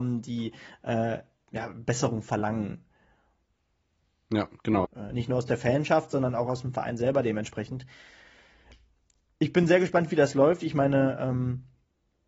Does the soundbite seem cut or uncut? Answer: cut